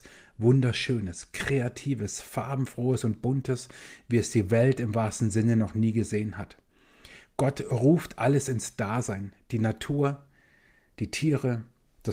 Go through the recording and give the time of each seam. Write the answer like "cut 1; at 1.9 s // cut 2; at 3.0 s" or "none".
none